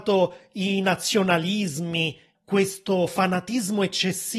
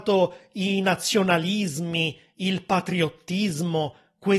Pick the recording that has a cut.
first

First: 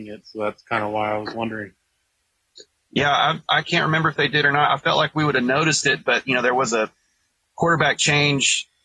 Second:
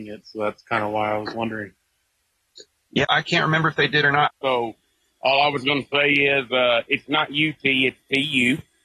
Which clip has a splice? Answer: second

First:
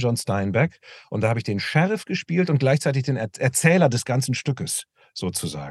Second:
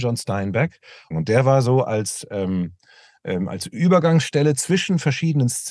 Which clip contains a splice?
second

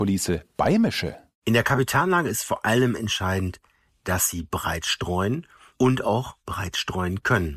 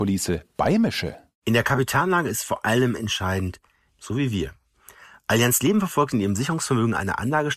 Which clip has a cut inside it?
second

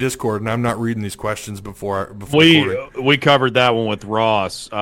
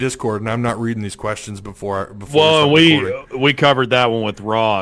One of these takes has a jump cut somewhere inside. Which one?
first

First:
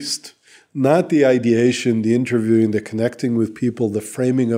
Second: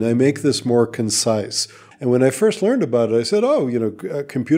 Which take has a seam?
second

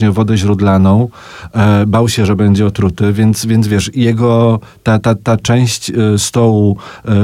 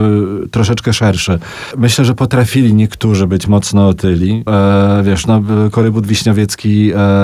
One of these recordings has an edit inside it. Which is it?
second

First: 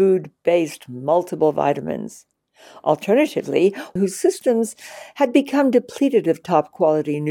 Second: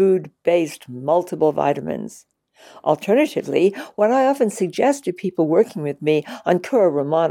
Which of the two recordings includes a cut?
first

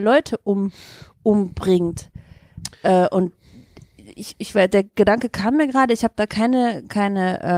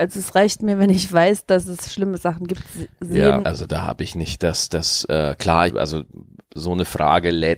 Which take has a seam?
second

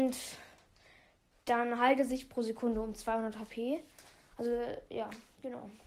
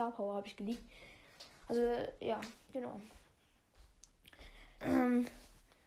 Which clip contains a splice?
second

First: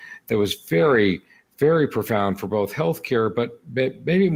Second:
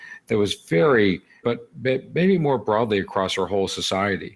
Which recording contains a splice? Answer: second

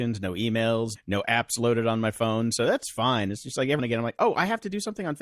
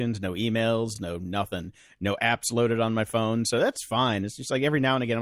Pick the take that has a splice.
first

